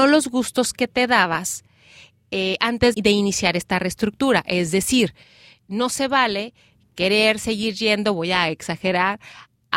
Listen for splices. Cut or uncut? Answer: cut